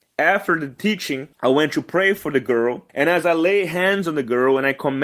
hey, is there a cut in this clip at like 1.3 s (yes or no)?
yes